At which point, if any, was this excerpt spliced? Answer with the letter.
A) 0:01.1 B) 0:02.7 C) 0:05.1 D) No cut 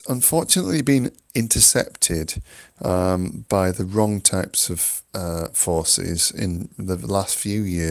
C